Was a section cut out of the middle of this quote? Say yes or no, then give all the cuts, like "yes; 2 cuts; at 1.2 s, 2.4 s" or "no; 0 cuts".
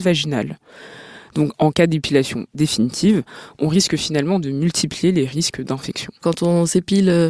yes; 1 cut; at 6.2 s